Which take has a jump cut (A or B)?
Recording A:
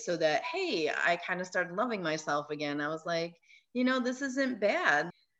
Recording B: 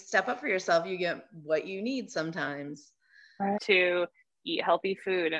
B